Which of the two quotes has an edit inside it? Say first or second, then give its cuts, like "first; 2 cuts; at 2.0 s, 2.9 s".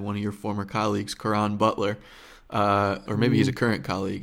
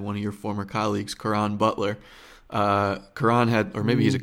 first; 1 cut; at 3.1 s